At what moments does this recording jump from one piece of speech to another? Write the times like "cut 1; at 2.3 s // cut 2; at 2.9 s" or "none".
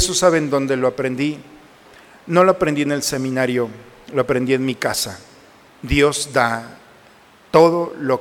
cut 1; at 5.7 s